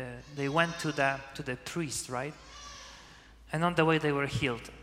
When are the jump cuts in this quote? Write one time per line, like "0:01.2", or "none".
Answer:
none